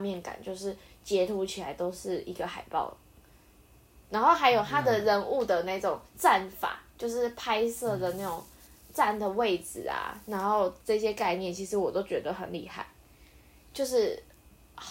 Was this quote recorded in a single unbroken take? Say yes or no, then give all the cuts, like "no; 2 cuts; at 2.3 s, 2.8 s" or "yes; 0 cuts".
yes; 0 cuts